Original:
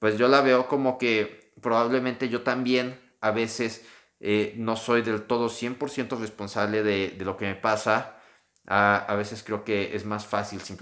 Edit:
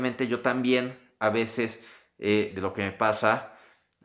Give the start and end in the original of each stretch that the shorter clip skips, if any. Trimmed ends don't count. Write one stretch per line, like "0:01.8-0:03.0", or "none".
0:04.5-0:07.1

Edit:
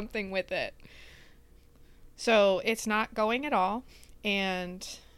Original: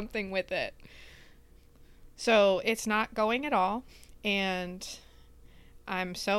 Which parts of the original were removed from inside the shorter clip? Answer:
none

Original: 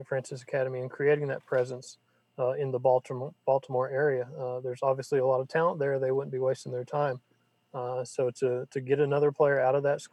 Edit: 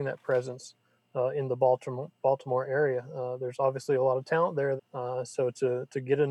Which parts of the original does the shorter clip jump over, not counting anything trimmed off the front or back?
0:06.0-0:07.6

